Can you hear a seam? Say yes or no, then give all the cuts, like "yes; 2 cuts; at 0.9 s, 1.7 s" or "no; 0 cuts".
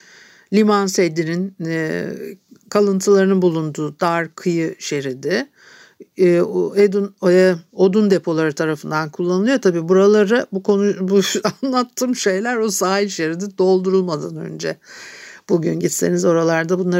no; 0 cuts